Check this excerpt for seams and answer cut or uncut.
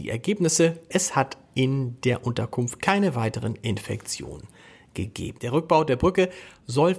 cut